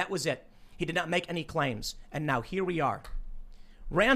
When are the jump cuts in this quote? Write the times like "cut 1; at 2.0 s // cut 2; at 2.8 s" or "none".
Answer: none